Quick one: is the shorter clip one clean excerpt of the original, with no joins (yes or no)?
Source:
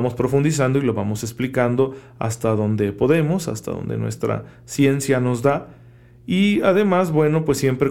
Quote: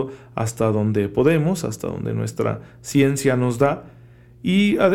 yes